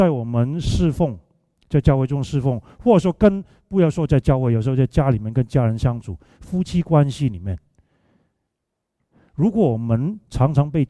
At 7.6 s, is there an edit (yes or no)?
no